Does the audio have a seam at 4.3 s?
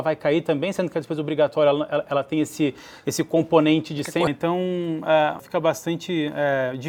yes; 2 cuts; at 4.3 s, 5.4 s

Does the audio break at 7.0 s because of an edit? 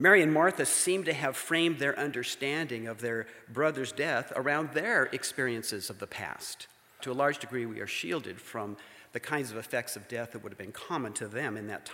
yes; 1 cut; at 7.0 s

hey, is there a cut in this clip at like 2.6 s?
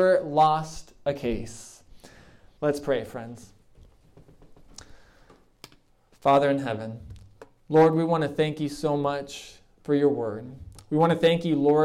yes; 1 cut; at 2.6 s

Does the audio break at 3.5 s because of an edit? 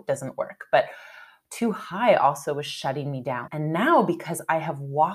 yes; 1 cut; at 3.5 s

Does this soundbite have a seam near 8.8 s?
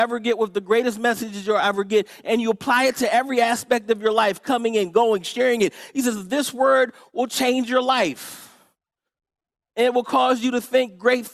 no; 0 cuts

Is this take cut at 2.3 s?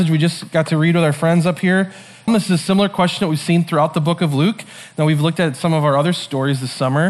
yes; 1 cut; at 2.3 s

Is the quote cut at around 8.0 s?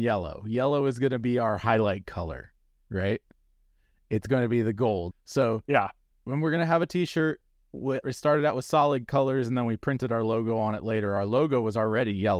yes; 2 cuts; at 5.1 s, 8.0 s

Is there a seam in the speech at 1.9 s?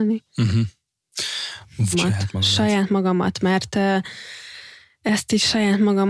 yes; 1 cut; at 1.9 s

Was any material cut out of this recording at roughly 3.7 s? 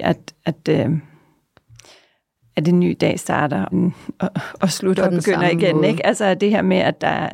yes; 1 cut; at 3.7 s

